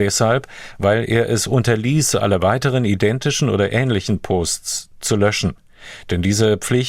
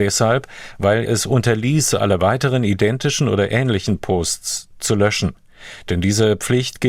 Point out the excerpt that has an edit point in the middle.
second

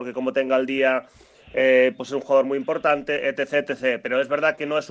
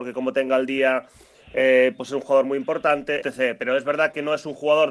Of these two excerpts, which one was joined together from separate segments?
second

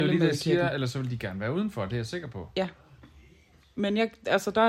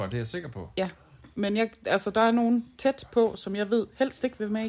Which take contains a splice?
second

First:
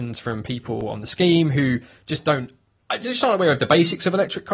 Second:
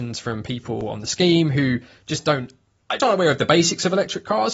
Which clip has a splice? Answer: second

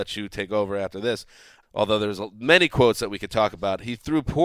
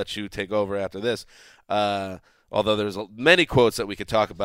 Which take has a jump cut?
first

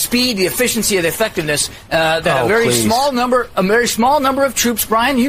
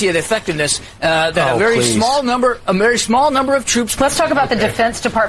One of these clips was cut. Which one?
second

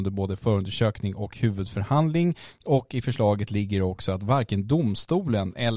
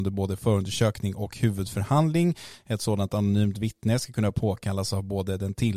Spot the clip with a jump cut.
first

